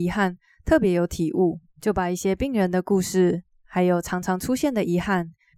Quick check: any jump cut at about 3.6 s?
no; 1 cut; at 1.7 s

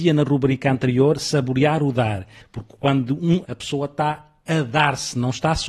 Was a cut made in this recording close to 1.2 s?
no; 2 cuts; at 2.4 s, 3.4 s

